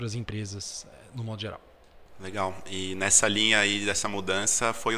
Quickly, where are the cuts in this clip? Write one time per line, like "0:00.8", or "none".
none